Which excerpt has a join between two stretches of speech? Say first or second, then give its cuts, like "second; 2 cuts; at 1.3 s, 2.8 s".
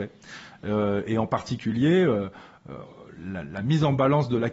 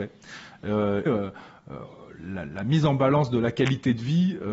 second; 1 cut; at 1.1 s